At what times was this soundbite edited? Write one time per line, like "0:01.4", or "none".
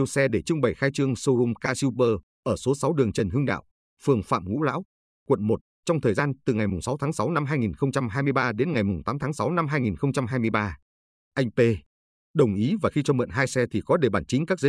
none